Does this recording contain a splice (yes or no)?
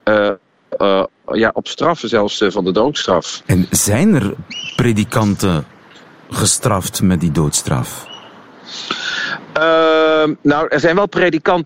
yes